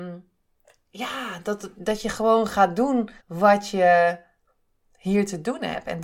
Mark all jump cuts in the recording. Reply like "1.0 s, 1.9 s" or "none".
1.7 s, 3.2 s